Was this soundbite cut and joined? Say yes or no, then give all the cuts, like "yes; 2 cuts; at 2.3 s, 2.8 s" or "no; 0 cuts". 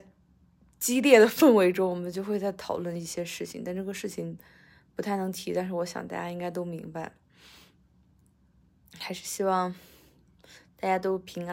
no; 0 cuts